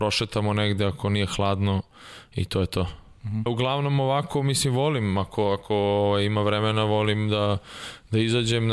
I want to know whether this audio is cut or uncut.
cut